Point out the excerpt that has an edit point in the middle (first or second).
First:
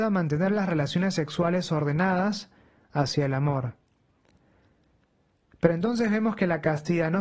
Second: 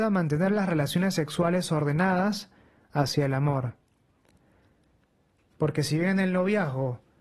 second